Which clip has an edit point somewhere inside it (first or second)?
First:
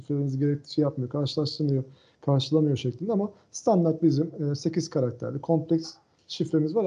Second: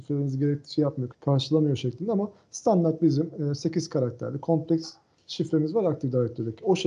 second